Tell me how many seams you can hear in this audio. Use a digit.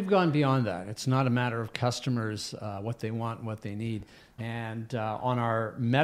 1